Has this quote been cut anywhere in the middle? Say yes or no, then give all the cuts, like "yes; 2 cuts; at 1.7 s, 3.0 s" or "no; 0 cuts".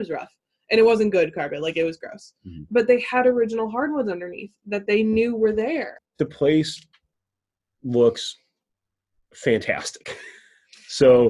yes; 1 cut; at 6.0 s